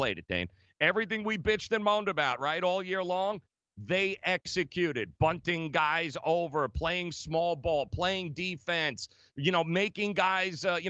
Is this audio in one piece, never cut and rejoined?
yes; 0 cuts

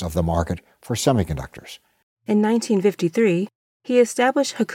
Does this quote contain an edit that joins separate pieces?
yes; 1 cut; at 2.2 s

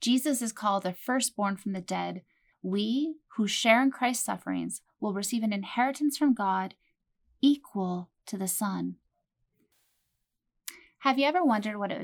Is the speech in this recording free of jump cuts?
no; 1 cut; at 2.5 s

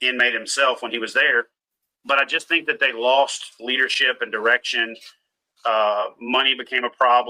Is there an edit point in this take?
no; 0 cuts

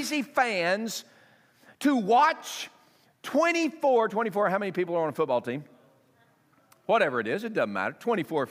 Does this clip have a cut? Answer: yes; 1 cut; at 4.1 s

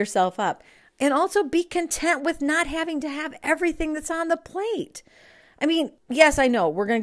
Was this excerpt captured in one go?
no; 1 cut; at 6.0 s

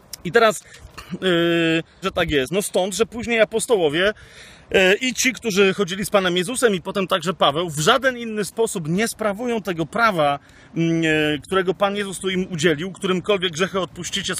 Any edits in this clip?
yes; 1 cut; at 2.0 s

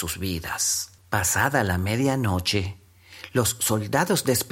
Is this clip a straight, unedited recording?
no; 1 cut; at 1.0 s

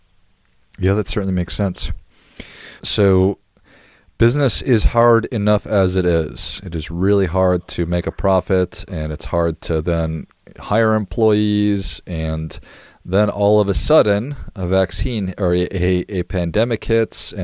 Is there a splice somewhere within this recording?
yes; 1 cut; at 2.8 s

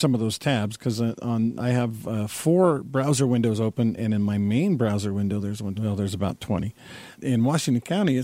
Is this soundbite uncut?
no; 3 cuts; at 4.0 s, 5.8 s, 7.2 s

